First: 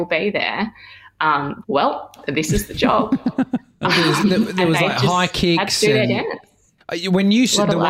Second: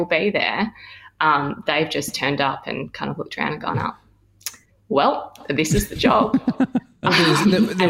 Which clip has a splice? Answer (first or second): first